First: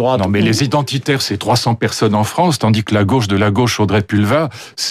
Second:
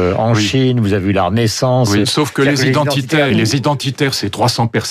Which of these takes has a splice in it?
second; 2 cuts; at 2.0 s, 3.3 s

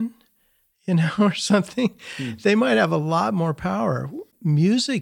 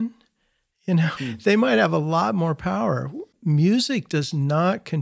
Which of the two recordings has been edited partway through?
second; 1 cut; at 1.2 s

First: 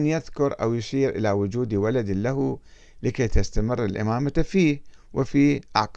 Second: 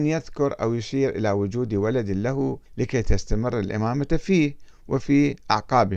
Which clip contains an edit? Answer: second; 1 cut; at 2.7 s

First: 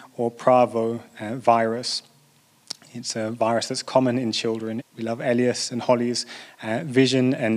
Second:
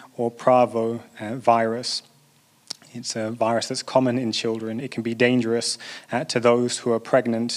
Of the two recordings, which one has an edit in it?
first; 1 cut; at 4.8 s

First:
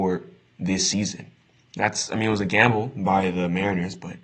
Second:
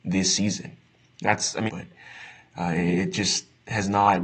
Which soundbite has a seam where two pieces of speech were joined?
second; 1 cut; at 1.7 s

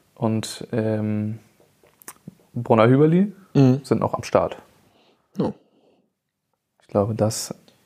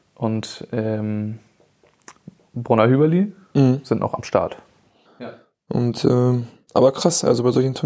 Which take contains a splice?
second; 1 cut; at 5.1 s

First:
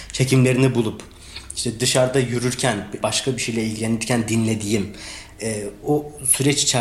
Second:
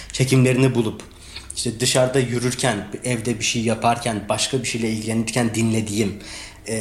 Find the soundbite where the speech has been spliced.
first; 2 cuts; at 3.0 s, 5.8 s

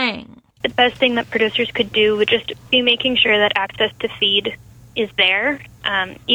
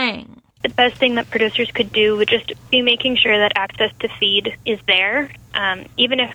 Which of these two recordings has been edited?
second; 1 cut; at 4.6 s

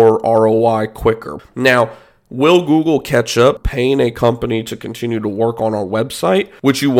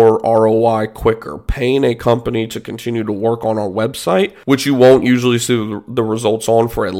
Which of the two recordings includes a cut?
first; 2 cuts; at 1.4 s, 3.6 s

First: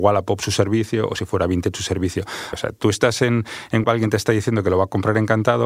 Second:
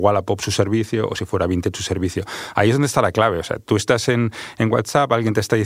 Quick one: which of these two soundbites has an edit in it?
first; 2 cuts; at 2.5 s, 3.8 s

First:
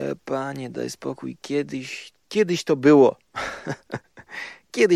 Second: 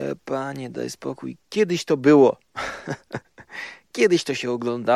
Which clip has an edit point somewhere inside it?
second; 1 cut; at 1.4 s

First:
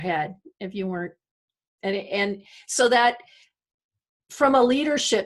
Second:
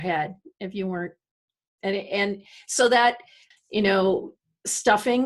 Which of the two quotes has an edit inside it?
second; 1 cut; at 3.5 s

